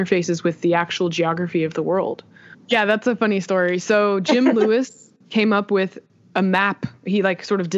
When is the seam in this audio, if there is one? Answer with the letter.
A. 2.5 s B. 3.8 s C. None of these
A